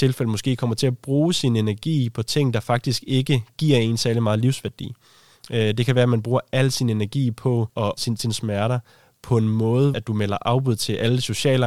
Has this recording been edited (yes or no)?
yes